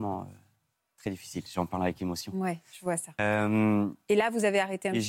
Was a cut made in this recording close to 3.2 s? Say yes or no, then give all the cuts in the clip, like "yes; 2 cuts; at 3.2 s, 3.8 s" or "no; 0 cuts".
no; 0 cuts